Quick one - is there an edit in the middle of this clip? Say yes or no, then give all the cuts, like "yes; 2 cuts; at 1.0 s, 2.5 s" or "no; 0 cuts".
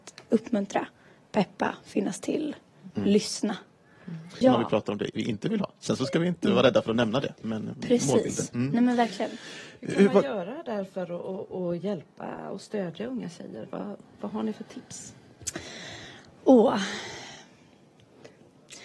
yes; 1 cut; at 4.4 s